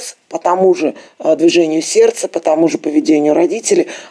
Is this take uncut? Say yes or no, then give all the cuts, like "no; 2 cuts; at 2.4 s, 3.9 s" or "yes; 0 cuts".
yes; 0 cuts